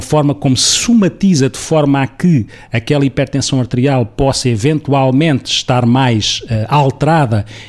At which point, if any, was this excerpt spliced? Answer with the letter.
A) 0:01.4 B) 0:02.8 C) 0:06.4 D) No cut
D